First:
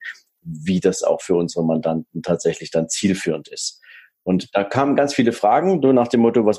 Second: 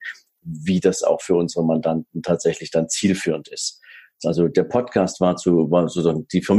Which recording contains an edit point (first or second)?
second